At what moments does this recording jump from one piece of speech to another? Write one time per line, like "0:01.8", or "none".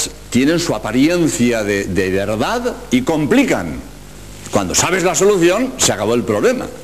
0:01.8